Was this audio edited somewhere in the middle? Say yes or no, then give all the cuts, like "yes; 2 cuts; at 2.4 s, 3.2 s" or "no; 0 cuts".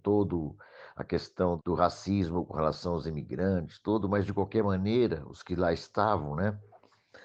no; 0 cuts